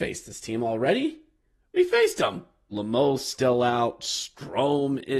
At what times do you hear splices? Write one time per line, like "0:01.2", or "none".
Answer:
0:02.7